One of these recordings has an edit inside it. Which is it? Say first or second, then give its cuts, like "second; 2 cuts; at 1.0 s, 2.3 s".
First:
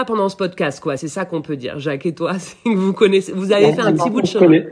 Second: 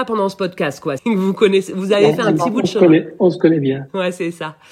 second; 1 cut; at 1.0 s